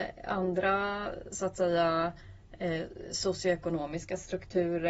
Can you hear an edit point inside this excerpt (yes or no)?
no